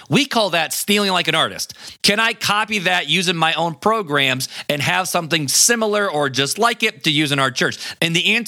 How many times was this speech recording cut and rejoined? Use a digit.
1